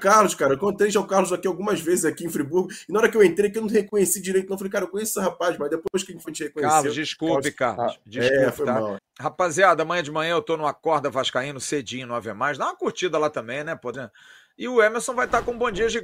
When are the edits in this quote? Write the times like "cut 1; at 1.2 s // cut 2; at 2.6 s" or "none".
cut 1; at 6.2 s // cut 2; at 9.0 s // cut 3; at 13.9 s